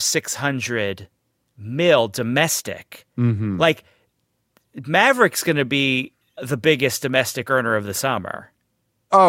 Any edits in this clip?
yes; 1 cut; at 6.4 s

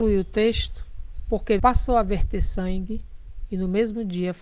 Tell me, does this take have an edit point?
yes; 1 cut; at 1.6 s

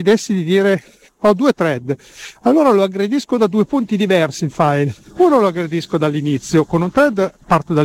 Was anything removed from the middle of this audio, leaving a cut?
no; 0 cuts

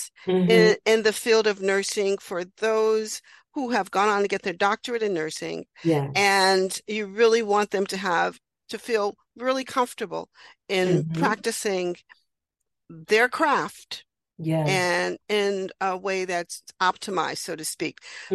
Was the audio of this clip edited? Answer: no; 0 cuts

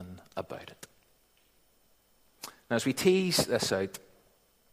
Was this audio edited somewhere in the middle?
no; 0 cuts

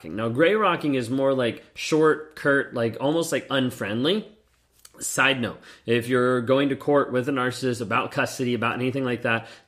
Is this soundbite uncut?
yes; 0 cuts

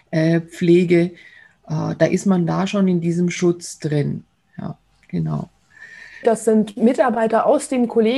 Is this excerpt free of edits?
no; 1 cut; at 6.2 s

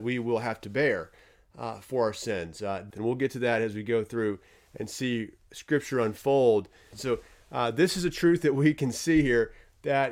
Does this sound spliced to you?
yes; 2 cuts; at 2.9 s, 6.9 s

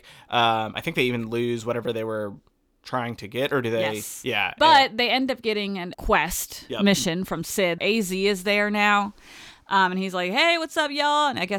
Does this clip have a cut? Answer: yes; 2 cuts; at 5.9 s, 7.8 s

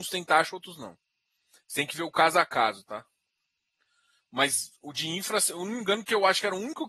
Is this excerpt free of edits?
yes; 0 cuts

